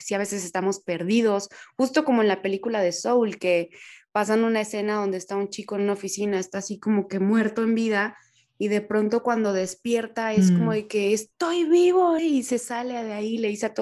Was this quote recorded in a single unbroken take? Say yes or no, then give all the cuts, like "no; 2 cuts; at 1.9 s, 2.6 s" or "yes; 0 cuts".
no; 1 cut; at 12.2 s